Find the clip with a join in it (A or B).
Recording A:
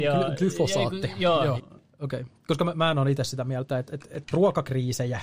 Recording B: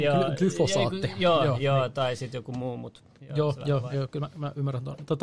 A